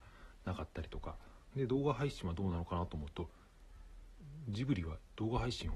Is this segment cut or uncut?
cut